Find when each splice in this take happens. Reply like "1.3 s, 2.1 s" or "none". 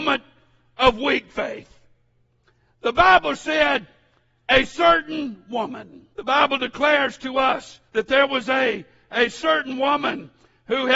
6.1 s, 7.9 s